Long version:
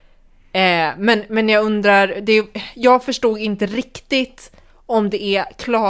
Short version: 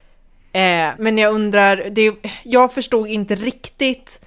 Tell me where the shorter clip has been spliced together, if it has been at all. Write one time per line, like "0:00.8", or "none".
0:01.0

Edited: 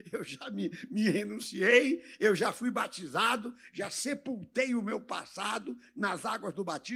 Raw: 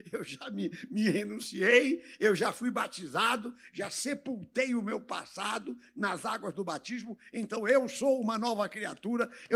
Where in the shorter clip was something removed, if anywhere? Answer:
none

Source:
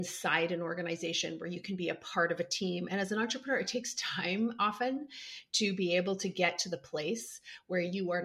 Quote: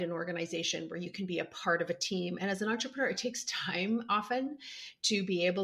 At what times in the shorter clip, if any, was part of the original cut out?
none

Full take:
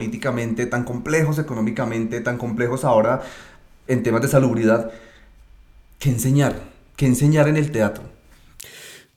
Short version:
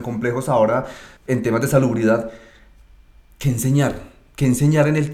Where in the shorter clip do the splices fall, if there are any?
0:01.2

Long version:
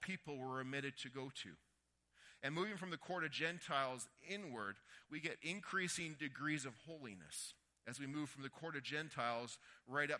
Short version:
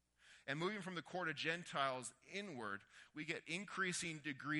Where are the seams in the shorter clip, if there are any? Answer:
none

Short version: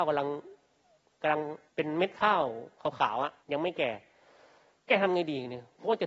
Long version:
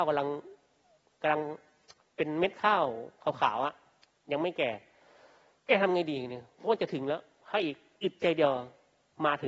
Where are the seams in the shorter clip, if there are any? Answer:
0:01.7
0:03.4

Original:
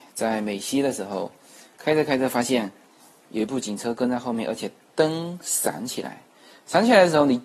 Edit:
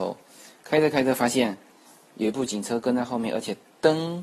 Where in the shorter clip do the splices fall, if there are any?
none

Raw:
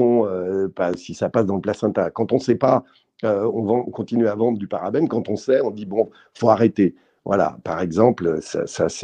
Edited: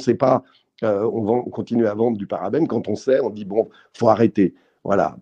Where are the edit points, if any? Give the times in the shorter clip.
none

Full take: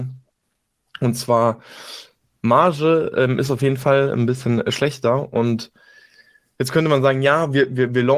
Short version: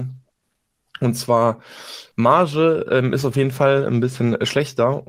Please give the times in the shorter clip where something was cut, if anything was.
0:02.1

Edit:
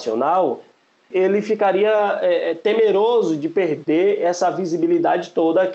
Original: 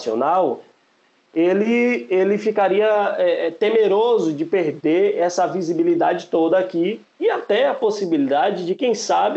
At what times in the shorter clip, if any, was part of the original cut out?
0:01.1

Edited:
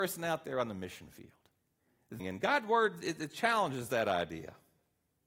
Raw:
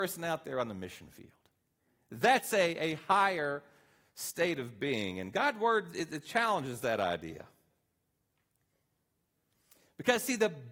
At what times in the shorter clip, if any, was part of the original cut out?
0:02.2

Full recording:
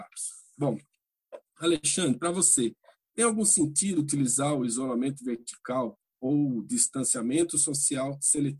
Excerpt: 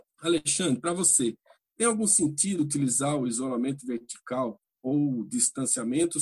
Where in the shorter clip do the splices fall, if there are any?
none

